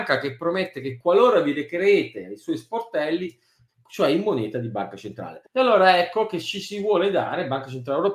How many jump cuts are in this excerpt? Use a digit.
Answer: 2